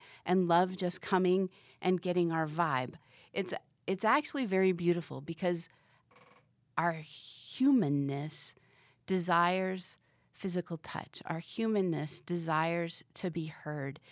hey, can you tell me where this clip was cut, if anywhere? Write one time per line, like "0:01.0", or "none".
none

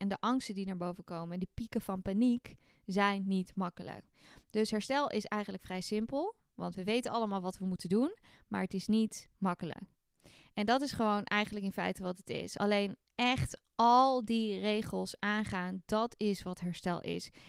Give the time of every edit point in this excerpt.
none

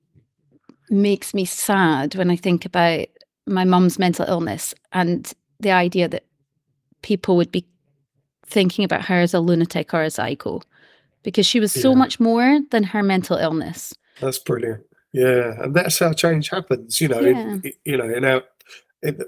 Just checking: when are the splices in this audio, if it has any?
0:14.2

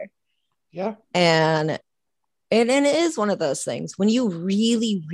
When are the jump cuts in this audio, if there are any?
none

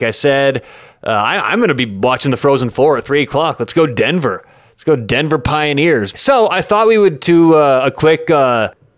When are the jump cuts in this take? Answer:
0:06.1

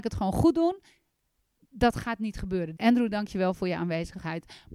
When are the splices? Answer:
0:02.8

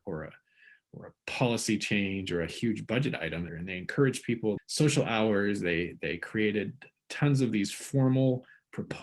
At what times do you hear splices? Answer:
0:03.5
0:04.6

